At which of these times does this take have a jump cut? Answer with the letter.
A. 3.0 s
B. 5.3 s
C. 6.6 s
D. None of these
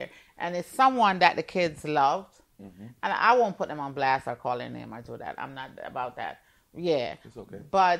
D